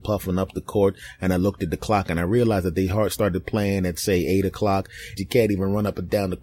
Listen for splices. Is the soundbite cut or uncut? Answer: cut